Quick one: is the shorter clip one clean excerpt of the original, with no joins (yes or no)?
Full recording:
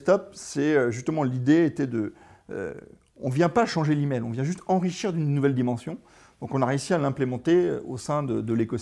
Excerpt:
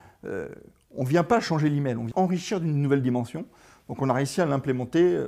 no